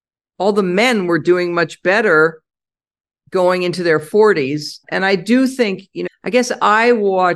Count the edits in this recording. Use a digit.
2